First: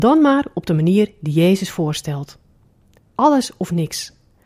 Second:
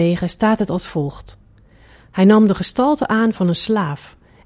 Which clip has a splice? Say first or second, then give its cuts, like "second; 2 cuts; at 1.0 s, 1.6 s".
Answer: first; 1 cut; at 3.1 s